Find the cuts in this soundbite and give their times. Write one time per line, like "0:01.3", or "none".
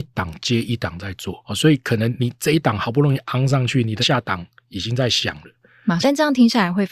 0:04.0
0:06.0